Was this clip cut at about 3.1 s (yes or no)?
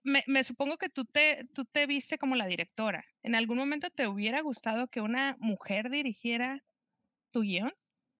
yes